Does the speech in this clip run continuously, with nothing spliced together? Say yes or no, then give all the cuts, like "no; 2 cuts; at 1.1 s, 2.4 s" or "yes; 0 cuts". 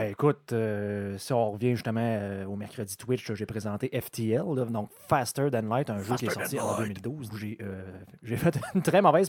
no; 1 cut; at 7.3 s